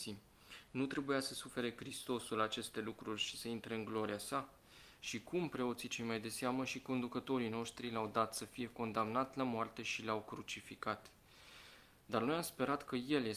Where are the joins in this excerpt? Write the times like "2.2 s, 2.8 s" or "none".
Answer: 5.0 s